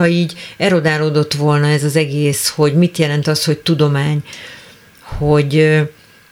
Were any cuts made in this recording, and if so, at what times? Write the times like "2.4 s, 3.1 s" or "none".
none

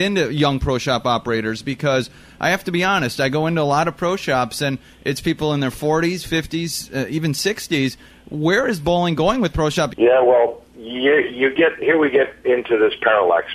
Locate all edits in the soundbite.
9.9 s

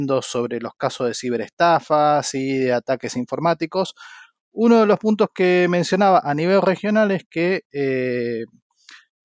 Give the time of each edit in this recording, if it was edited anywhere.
none

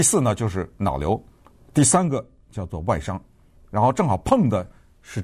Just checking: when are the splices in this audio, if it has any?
1.6 s, 3.6 s

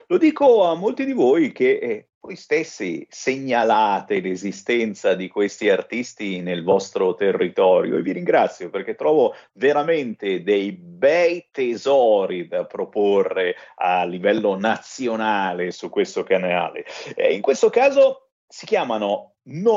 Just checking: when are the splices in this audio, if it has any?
none

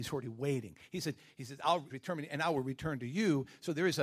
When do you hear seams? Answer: 1.9 s

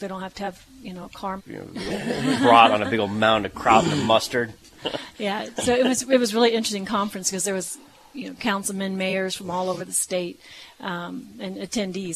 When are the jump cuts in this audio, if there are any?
1.4 s

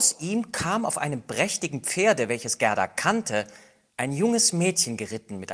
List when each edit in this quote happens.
3.9 s

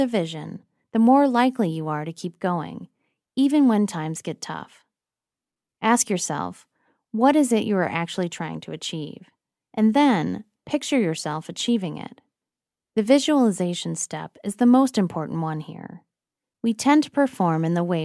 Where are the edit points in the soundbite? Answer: none

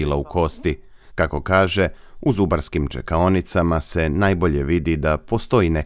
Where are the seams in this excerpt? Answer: 1.1 s

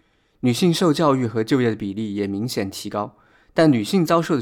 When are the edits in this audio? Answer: none

